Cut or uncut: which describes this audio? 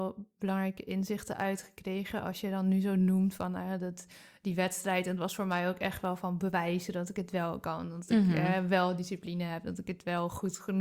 uncut